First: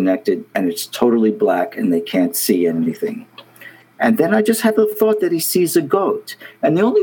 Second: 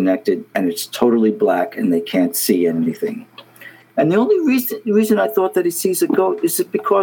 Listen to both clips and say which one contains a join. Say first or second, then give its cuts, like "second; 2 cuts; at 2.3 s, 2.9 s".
second; 1 cut; at 3.9 s